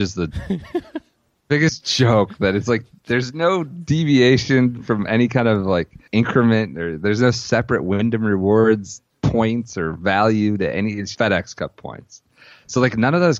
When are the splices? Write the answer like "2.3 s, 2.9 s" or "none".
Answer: 6.1 s, 11.1 s